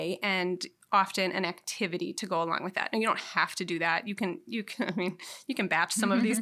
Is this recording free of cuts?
yes; 0 cuts

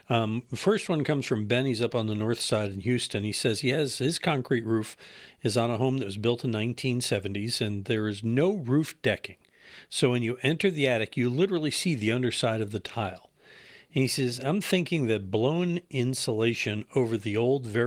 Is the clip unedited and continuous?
yes; 0 cuts

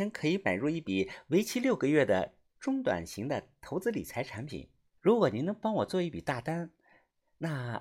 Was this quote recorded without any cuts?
no; 1 cut; at 5.0 s

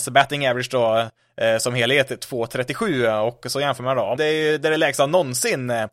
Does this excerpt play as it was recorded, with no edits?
no; 1 cut; at 4.2 s

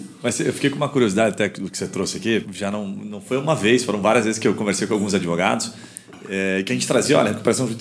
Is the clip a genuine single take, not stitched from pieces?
no; 1 cut; at 2.4 s

